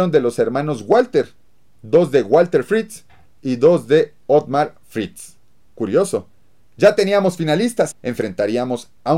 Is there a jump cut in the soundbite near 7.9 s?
yes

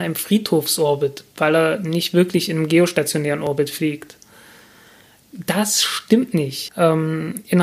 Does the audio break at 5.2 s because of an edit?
no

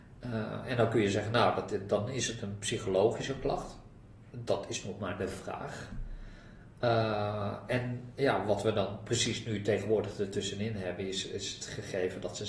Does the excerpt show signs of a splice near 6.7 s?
no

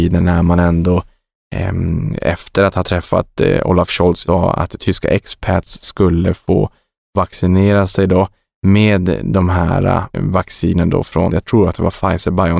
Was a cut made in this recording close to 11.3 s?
yes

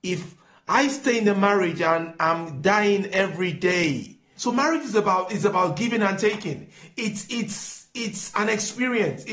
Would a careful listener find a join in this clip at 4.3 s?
yes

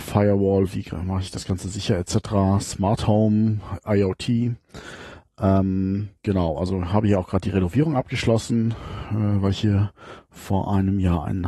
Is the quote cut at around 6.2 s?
yes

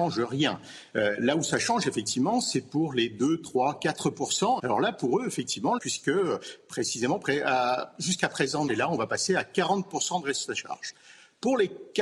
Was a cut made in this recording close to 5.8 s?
yes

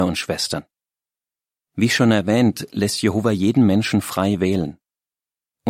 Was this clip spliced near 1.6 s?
yes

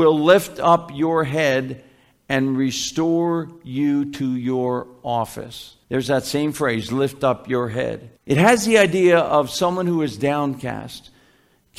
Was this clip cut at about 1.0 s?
no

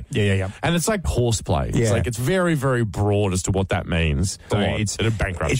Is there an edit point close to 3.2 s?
no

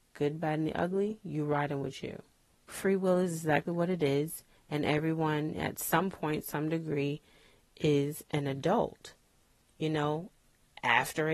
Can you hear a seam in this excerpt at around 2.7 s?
yes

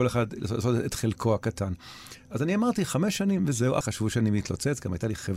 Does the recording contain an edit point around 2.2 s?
no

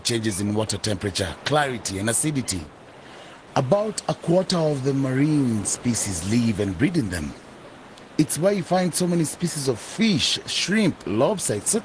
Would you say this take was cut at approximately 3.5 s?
yes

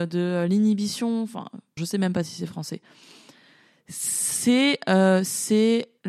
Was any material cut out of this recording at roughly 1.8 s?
yes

